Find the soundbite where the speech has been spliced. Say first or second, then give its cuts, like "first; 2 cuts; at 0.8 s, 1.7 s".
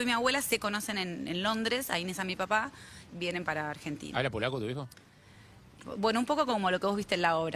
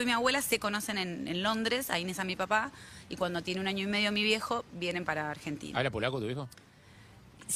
first; 2 cuts; at 3.1 s, 5.8 s